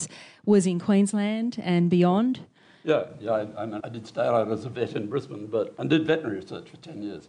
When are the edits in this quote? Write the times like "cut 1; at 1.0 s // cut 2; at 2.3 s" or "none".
cut 1; at 3.8 s